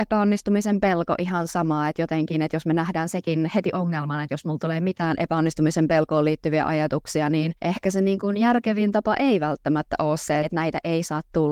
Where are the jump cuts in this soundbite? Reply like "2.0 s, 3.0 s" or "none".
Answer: 7.6 s, 10.4 s